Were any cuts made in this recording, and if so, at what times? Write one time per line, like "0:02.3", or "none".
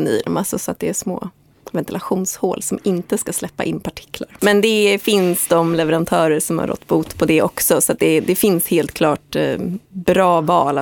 0:04.4